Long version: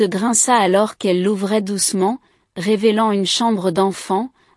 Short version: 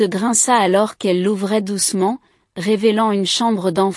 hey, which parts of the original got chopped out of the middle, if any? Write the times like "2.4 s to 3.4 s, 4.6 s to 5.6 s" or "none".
none